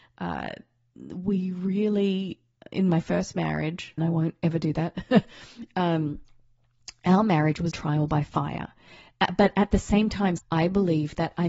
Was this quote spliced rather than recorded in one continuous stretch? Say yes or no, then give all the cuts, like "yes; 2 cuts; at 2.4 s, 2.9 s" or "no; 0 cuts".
yes; 3 cuts; at 4.0 s, 7.7 s, 10.4 s